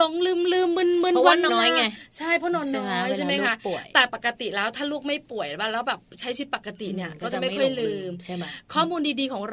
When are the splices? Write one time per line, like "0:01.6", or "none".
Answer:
0:01.5